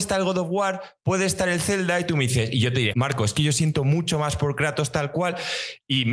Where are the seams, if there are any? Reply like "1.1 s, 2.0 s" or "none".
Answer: 2.9 s